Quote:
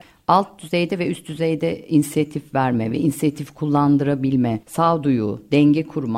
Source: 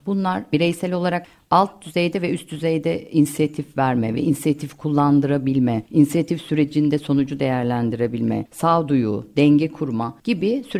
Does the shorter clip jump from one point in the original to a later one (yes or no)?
yes